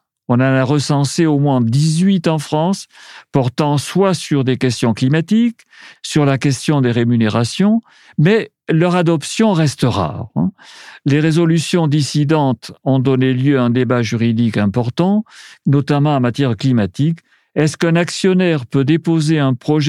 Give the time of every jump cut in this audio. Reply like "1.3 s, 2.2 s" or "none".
6.0 s, 15.6 s